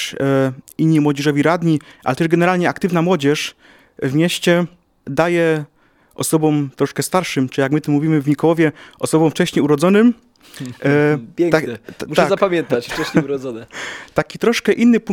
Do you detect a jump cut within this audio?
no; 0 cuts

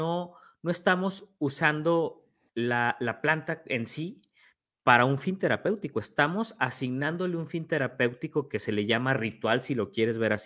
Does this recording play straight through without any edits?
yes; 0 cuts

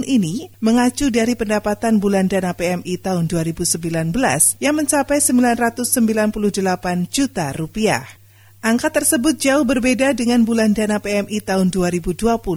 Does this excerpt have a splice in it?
no; 0 cuts

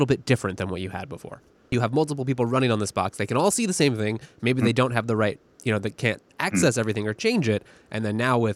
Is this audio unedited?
no; 2 cuts; at 1.7 s, 6.3 s

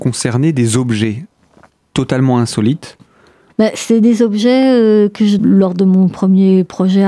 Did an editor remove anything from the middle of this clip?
yes; 2 cuts; at 3.5 s, 5.4 s

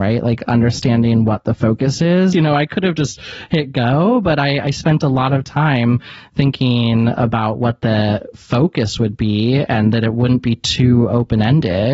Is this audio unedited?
no; 1 cut; at 2.3 s

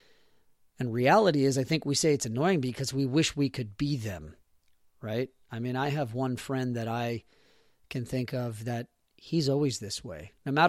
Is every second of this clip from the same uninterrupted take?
yes; 0 cuts

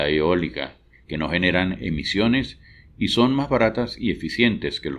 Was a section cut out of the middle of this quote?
yes; 1 cut; at 1.0 s

